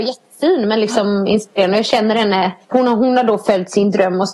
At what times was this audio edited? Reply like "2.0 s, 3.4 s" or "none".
2.6 s